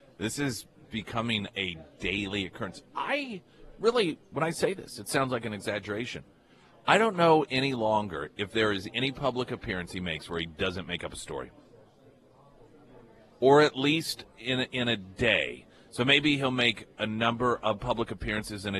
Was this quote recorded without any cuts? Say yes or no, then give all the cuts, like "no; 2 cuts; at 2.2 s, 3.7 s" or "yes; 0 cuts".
yes; 0 cuts